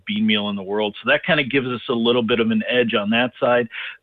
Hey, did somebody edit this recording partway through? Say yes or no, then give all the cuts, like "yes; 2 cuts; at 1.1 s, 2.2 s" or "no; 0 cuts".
no; 0 cuts